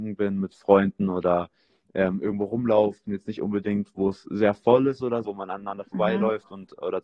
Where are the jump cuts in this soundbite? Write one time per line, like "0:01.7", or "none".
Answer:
0:03.1
0:05.2